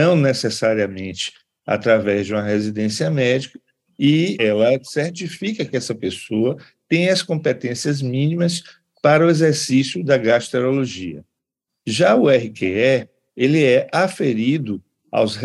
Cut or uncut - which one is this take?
cut